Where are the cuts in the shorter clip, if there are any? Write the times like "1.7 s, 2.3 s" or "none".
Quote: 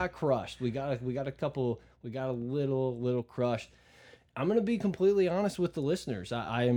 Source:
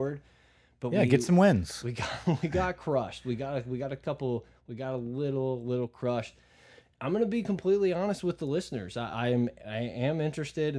none